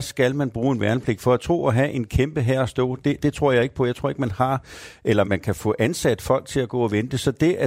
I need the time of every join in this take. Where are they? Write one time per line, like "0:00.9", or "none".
0:05.2

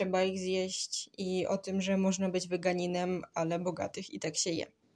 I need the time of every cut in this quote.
none

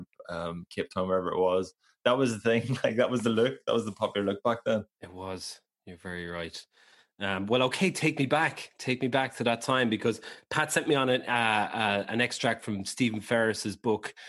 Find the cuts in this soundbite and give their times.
0:04.9

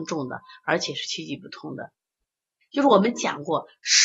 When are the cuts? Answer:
0:02.6

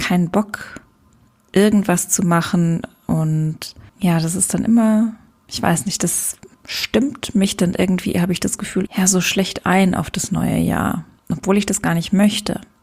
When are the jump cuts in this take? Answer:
0:03.9
0:06.5
0:08.9

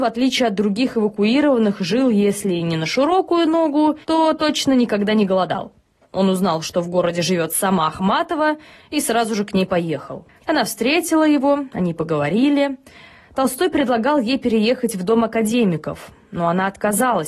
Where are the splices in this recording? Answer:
0:04.0
0:10.4

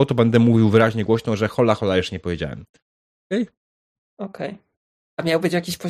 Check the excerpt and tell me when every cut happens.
0:01.8
0:04.0

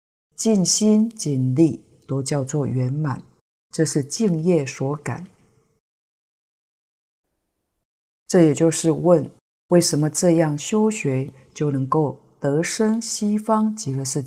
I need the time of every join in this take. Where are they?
none

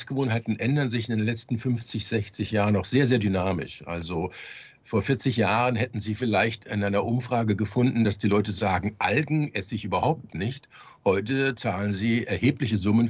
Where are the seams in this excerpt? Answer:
none

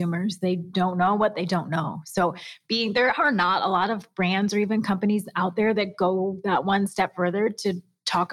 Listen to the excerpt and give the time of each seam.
none

